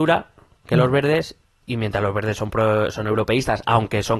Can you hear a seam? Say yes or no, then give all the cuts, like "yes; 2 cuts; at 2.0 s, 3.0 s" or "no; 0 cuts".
no; 0 cuts